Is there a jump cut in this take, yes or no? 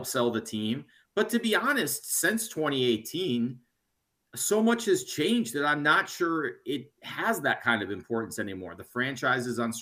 no